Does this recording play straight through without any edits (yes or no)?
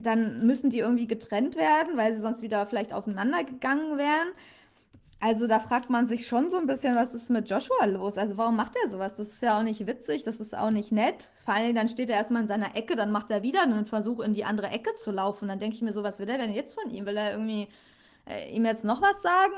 yes